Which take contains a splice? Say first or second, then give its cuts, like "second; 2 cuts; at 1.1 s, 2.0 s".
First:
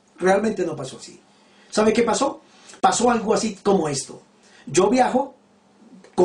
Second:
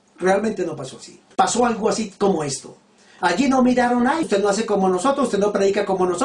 second; 3 cuts; at 1.3 s, 3.2 s, 4.2 s